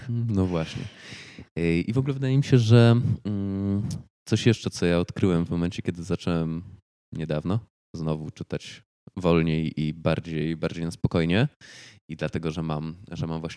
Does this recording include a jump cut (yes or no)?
no